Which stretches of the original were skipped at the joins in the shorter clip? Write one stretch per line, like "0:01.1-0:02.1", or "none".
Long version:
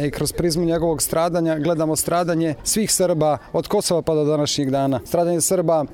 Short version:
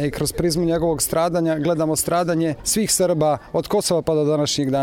none